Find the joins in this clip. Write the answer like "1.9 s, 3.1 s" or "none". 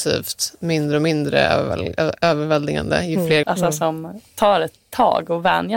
3.4 s